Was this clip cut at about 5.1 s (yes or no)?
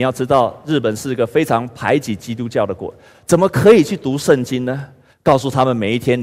yes